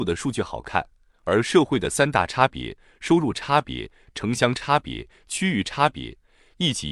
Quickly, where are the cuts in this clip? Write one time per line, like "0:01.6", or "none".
none